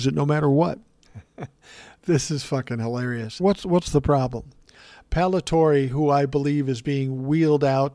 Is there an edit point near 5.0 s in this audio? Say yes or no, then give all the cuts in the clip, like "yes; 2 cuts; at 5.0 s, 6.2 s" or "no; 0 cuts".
no; 2 cuts; at 1.1 s, 3.4 s